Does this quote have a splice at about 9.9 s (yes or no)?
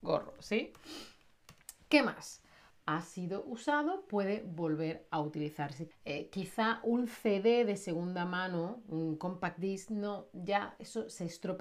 no